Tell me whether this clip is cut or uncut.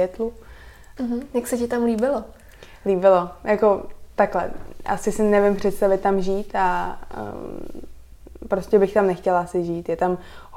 cut